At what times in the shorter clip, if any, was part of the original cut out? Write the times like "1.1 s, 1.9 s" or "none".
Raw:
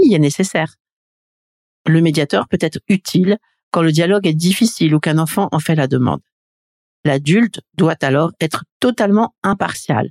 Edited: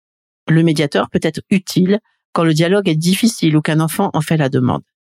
none